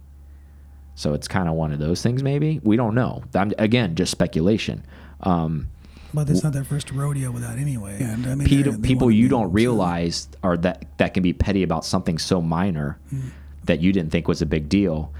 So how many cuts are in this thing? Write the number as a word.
two